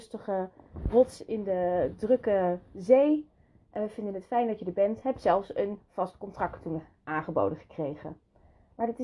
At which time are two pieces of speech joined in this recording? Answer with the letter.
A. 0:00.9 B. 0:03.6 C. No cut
A